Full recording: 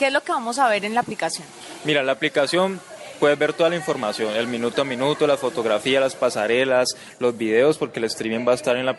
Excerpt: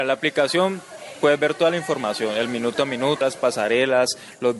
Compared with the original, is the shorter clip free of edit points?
no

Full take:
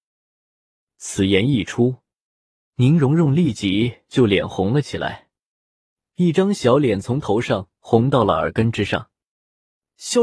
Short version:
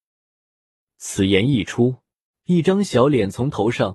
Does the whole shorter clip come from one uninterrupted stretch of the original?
no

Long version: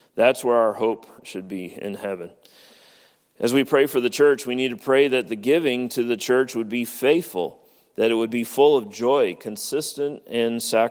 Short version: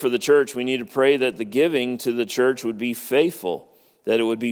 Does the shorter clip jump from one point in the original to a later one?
no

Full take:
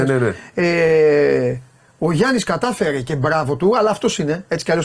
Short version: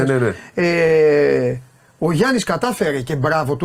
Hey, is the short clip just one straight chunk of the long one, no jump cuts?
yes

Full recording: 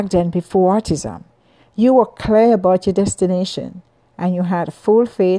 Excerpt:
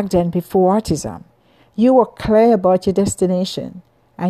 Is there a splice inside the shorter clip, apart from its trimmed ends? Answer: no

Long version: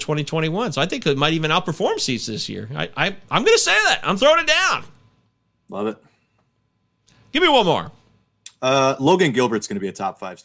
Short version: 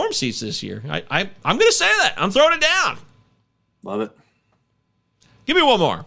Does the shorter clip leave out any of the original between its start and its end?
no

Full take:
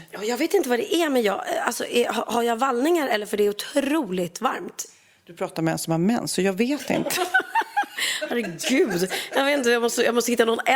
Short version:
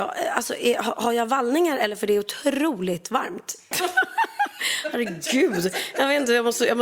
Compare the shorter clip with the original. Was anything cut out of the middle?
yes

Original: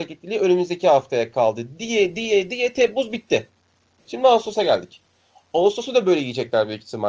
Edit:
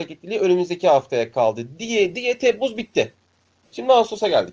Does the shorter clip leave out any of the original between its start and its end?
yes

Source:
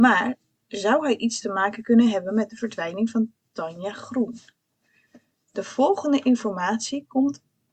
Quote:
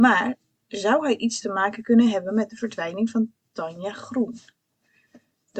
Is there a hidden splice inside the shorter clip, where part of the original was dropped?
no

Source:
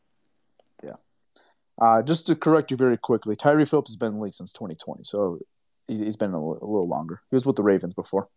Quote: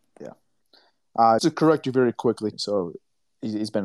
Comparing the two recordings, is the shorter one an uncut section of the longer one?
no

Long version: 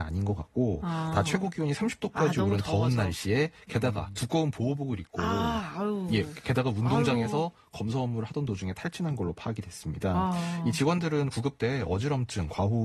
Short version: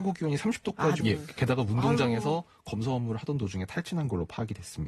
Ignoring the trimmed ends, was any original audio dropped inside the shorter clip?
yes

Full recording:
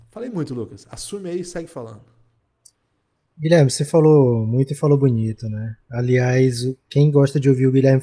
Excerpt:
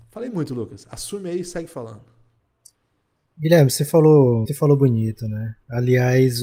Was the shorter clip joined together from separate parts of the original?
yes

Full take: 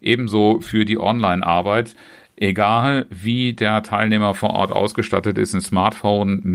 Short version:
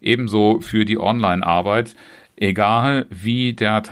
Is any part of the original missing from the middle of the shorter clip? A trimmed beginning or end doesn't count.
no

